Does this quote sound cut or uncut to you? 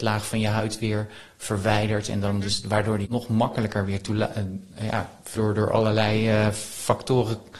cut